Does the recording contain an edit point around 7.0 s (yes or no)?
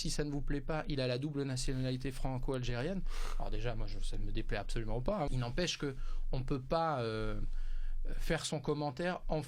no